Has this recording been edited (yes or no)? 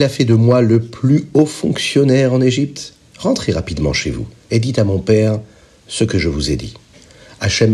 no